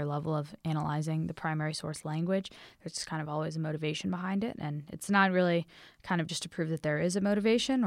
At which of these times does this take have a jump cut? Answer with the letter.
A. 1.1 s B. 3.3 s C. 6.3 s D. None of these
D